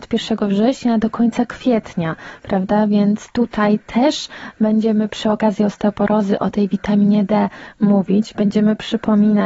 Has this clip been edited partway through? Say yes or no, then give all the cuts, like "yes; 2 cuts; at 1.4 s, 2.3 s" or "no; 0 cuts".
no; 0 cuts